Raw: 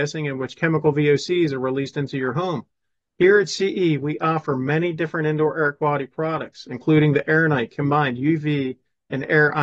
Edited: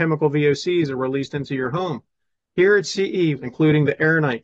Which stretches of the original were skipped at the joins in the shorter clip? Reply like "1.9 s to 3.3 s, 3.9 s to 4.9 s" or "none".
4.0 s to 6.6 s